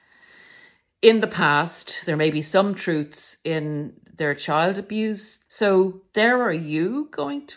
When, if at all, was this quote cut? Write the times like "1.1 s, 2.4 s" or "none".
5.5 s